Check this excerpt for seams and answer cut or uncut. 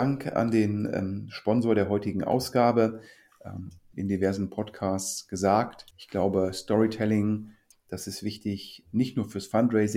cut